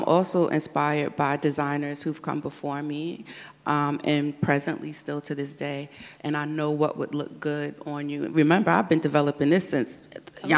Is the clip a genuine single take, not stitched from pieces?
no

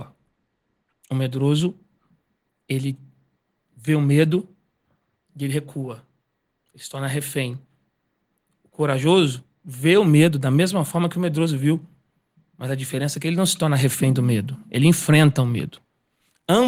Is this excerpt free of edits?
yes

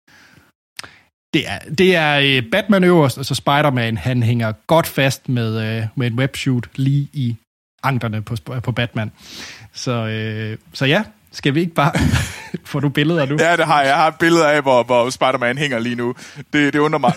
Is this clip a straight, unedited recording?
yes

